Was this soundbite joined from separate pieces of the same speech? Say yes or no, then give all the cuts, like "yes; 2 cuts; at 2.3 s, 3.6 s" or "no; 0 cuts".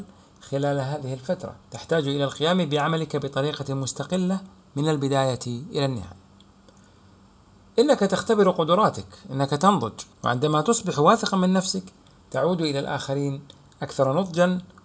yes; 2 cuts; at 1.6 s, 10.1 s